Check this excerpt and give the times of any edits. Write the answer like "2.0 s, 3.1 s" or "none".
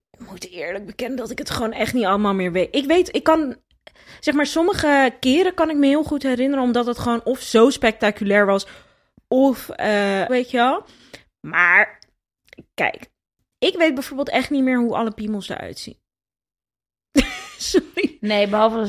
10.3 s